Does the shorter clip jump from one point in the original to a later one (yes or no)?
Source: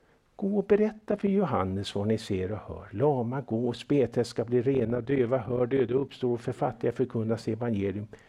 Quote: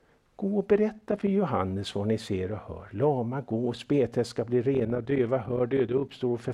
no